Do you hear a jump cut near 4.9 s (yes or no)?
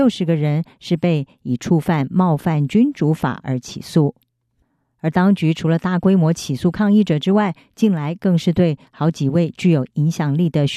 no